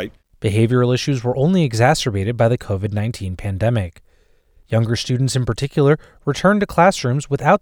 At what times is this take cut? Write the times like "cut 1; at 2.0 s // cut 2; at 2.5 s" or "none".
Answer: none